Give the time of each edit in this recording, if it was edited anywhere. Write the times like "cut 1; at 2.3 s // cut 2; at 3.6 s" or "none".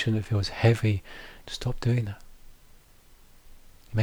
cut 1; at 1.4 s